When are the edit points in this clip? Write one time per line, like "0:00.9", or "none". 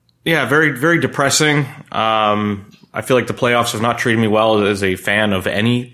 none